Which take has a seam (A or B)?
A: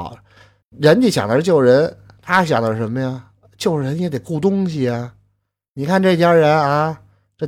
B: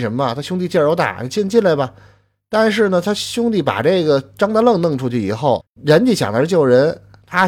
B